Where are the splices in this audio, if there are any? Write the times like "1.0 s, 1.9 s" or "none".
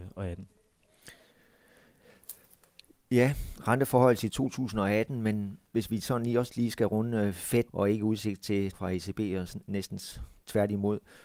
5.7 s, 7.7 s, 8.7 s